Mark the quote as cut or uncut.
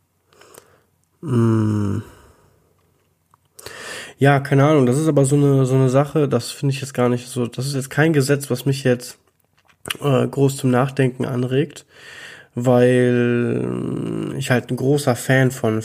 uncut